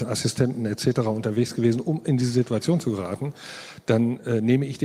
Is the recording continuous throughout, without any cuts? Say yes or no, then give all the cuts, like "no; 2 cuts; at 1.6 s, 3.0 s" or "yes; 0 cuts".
yes; 0 cuts